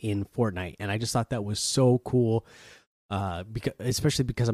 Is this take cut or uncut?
uncut